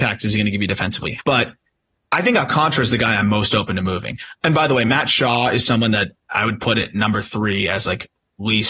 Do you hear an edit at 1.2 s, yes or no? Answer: yes